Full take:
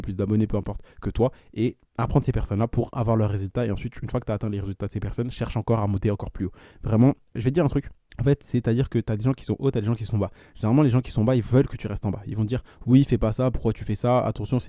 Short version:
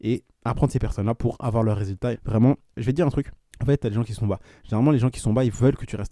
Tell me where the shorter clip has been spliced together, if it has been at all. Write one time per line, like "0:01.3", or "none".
0:02.1
0:03.8